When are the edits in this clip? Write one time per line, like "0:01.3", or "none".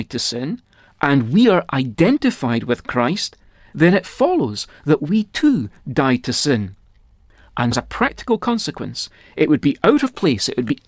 0:07.7